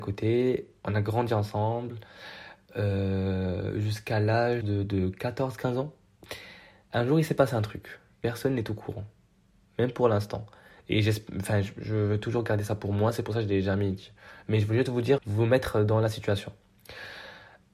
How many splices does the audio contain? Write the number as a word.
two